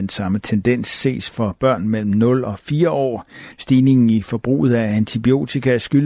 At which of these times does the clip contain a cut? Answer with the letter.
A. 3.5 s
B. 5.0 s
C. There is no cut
A